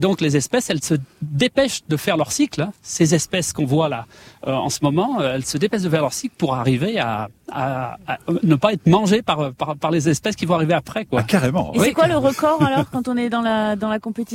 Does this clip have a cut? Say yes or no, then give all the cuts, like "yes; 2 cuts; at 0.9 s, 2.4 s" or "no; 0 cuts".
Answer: no; 0 cuts